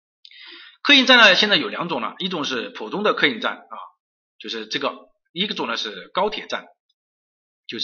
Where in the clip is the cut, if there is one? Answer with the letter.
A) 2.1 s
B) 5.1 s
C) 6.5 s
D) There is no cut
D